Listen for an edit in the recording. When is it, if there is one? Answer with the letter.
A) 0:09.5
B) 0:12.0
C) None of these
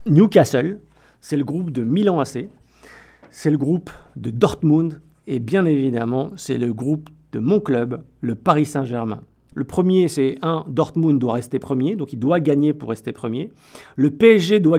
A